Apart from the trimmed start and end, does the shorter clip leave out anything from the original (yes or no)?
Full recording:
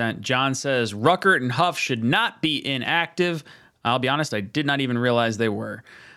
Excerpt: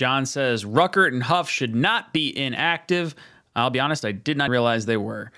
yes